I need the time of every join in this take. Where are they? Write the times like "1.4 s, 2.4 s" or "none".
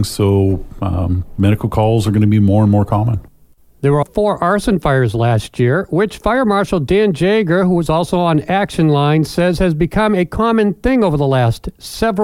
4.0 s